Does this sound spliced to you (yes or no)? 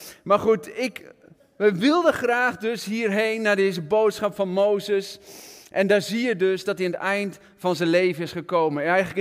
no